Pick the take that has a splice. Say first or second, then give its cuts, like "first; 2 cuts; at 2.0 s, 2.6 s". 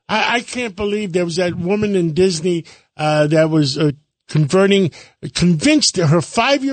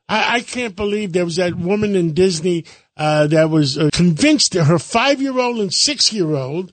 second; 1 cut; at 3.9 s